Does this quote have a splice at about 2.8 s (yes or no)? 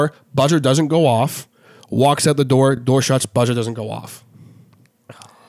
no